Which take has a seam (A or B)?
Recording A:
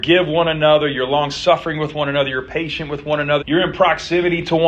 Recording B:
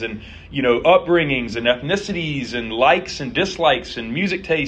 A